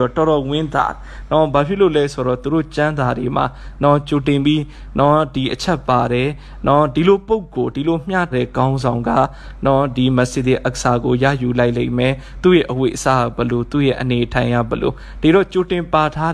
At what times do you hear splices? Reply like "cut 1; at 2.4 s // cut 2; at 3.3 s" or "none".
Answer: cut 1; at 8.3 s